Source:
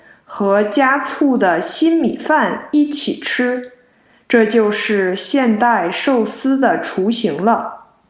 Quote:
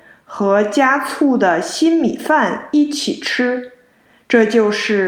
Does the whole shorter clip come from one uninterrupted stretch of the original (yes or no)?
yes